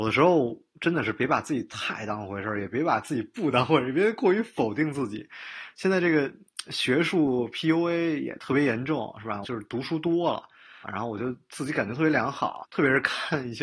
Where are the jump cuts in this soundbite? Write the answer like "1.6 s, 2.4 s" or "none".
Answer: 9.4 s, 10.8 s, 12.6 s